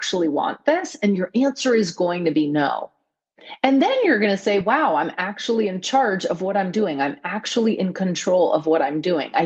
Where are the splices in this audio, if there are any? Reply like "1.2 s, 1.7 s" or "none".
none